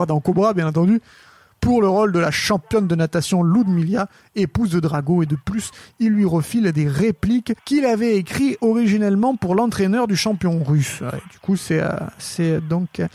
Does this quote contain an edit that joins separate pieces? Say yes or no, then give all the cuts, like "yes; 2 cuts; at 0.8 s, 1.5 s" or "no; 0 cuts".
yes; 1 cut; at 7.6 s